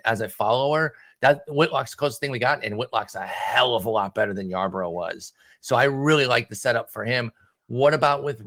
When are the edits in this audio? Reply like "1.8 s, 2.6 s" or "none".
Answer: none